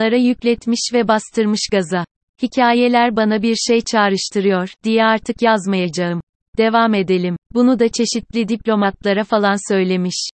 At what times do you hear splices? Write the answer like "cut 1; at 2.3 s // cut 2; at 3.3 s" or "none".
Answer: cut 1; at 7.4 s